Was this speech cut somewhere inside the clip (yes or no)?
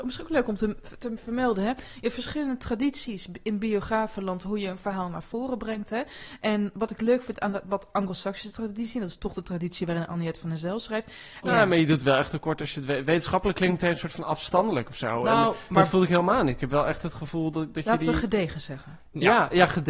yes